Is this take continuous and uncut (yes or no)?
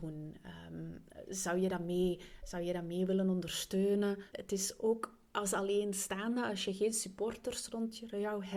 no